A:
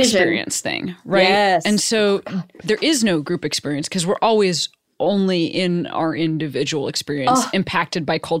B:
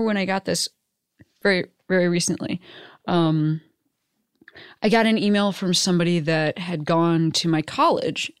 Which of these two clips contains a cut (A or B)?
A